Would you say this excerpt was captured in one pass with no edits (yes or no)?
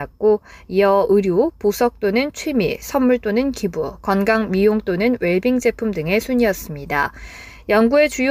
yes